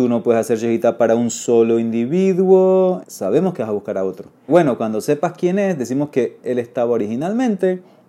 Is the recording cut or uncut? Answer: cut